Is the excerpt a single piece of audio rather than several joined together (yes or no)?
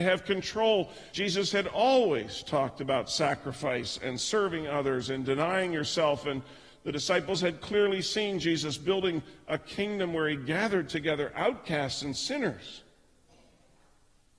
no